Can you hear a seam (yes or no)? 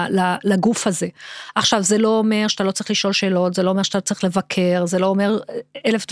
no